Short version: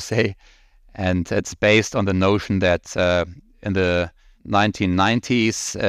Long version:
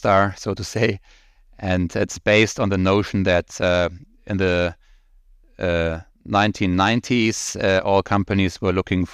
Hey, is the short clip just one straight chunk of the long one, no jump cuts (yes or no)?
no